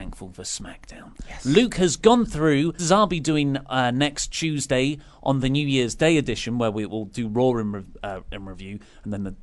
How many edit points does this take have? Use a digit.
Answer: 1